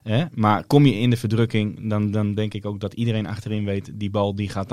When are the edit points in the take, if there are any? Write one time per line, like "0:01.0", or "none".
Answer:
none

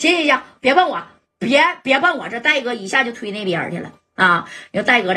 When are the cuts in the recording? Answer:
none

